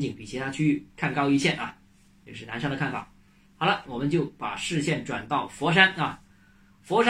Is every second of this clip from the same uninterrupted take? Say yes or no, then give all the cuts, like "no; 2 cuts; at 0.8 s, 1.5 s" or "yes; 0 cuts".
no; 1 cut; at 3.8 s